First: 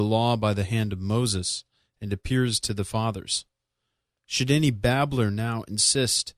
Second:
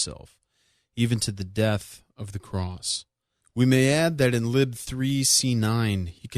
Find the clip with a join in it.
second; 1 cut; at 3.4 s

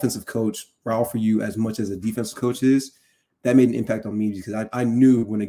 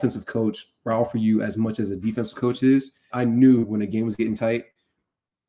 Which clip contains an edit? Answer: second; 1 cut; at 3.1 s

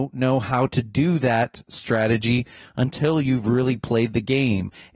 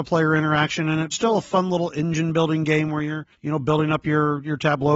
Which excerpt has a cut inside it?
second; 2 cuts; at 1.1 s, 3.3 s

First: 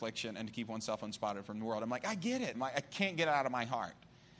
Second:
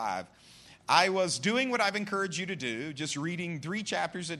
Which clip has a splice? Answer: first; 1 cut; at 2.5 s

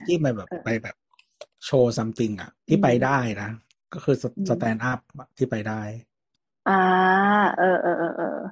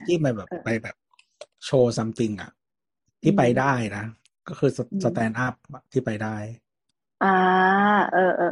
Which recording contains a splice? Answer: first; 1 cut; at 2.6 s

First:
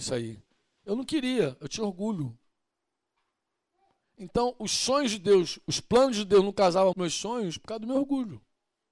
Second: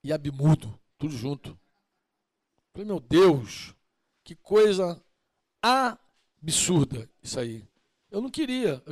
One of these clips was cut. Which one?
first; 1 cut; at 6.9 s

